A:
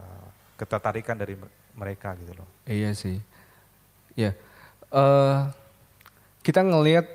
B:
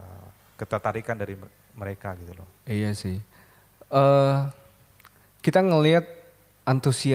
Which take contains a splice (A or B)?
B